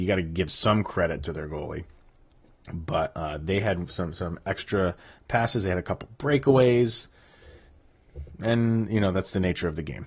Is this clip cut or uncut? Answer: uncut